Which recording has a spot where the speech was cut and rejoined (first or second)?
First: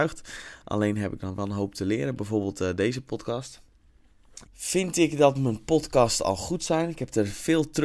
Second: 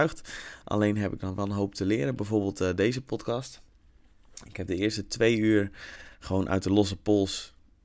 first